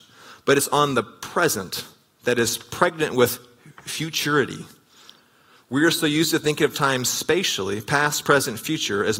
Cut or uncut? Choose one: uncut